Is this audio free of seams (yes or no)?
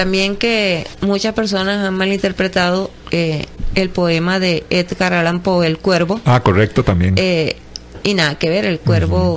yes